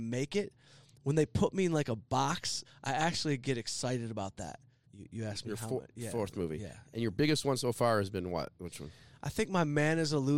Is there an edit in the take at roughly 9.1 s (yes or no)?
no